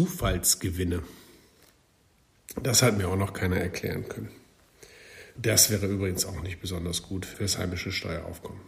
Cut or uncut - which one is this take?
cut